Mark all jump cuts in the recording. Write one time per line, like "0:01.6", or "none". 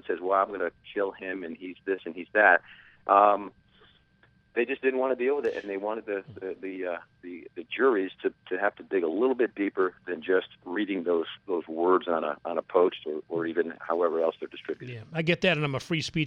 none